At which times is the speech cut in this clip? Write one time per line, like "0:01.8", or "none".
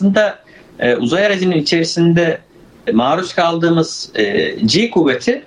0:02.9